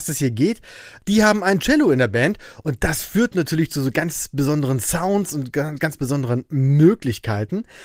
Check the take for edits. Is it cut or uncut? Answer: cut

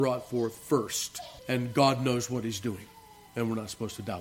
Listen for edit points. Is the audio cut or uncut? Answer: cut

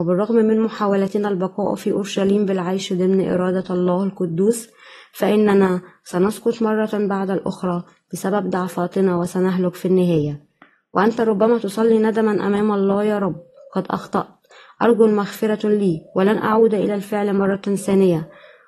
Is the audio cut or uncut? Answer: uncut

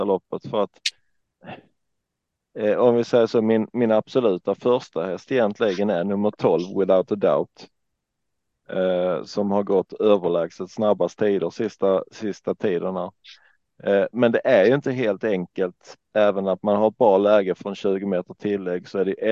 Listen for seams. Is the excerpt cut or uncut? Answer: uncut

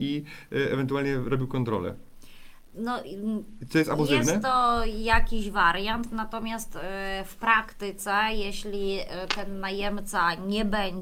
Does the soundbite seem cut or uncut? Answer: uncut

